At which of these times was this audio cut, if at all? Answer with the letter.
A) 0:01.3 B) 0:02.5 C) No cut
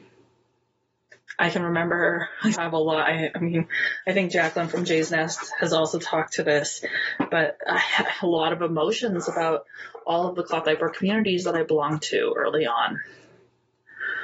B